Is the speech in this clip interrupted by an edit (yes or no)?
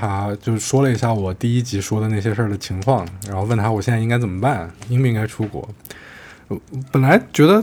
no